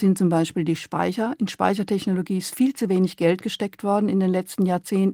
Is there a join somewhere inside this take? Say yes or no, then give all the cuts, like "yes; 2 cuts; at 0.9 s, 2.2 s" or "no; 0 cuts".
no; 0 cuts